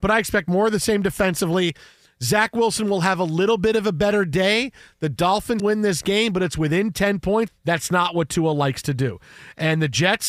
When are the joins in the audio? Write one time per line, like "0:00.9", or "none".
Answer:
0:05.6
0:07.5